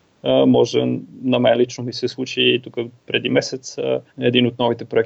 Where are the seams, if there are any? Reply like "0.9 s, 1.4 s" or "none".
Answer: 4.1 s

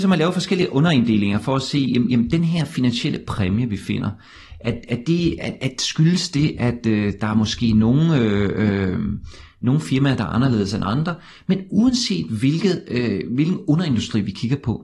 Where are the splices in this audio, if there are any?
none

